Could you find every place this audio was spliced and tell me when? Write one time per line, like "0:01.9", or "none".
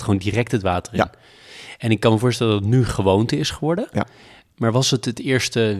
none